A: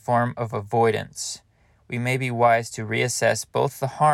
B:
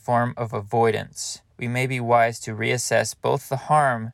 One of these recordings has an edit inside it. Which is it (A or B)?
B